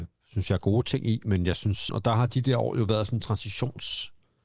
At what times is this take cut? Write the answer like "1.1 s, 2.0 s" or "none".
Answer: 1.9 s